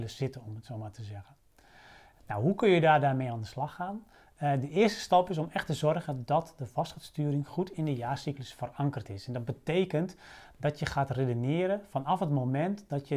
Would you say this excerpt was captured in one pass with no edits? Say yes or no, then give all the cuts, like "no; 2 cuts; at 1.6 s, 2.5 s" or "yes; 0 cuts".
yes; 0 cuts